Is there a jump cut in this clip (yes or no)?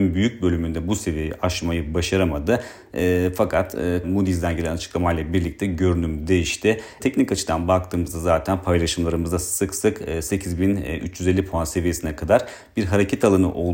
yes